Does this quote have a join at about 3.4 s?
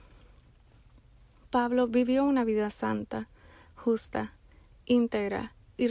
no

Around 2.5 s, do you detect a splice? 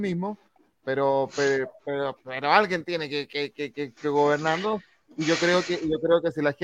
no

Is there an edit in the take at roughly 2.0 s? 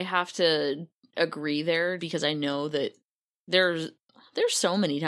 yes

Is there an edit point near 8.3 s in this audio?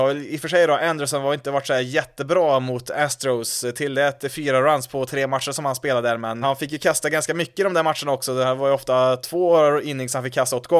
no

